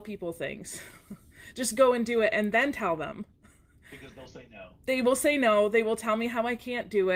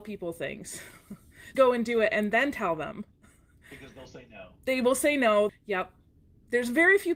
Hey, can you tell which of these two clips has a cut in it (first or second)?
second